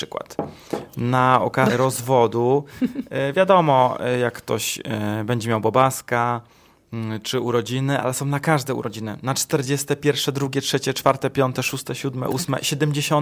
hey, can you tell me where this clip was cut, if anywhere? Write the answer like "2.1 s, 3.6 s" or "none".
1.7 s